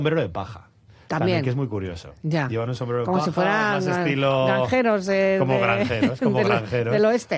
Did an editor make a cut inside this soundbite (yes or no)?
no